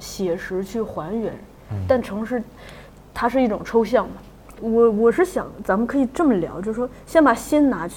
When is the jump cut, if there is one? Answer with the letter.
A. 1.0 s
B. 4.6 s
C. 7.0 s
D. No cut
B